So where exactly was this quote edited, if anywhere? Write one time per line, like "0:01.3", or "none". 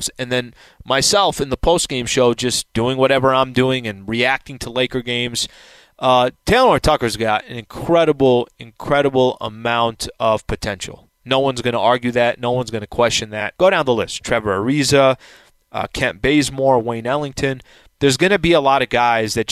0:13.5